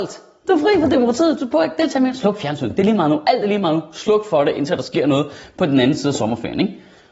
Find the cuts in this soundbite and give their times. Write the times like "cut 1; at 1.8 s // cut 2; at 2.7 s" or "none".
none

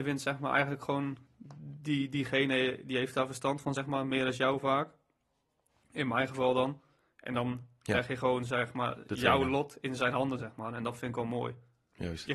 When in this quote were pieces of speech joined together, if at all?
none

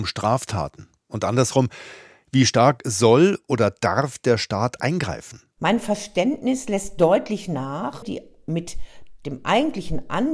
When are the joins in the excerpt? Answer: cut 1; at 5.6 s // cut 2; at 8.0 s

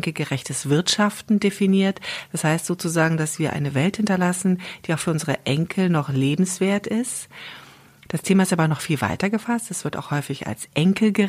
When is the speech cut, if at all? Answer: cut 1; at 8.1 s

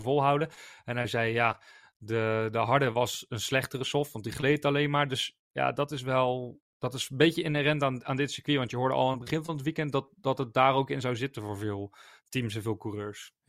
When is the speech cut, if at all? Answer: cut 1; at 6.7 s

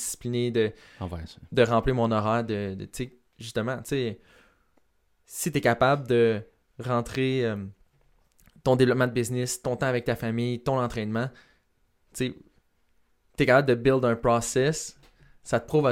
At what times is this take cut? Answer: none

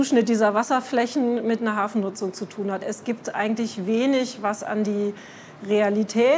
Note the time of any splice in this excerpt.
cut 1; at 2.8 s

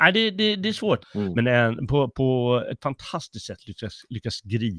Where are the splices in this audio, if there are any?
cut 1; at 1.0 s

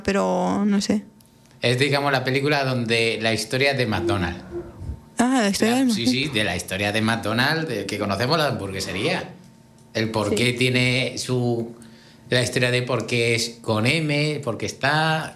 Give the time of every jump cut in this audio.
none

